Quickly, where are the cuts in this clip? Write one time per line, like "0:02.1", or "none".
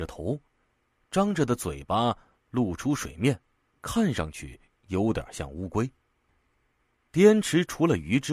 none